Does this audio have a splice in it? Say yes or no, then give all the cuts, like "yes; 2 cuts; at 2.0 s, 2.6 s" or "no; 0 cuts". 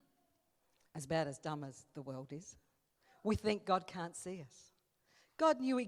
no; 0 cuts